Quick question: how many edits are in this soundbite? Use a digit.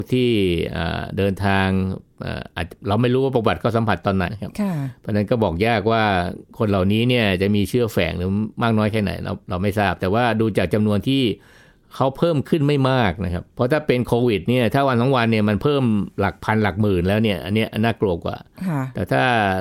2